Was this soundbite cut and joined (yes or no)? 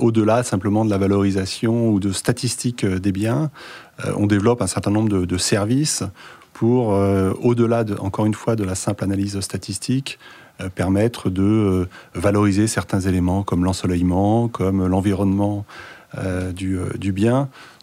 no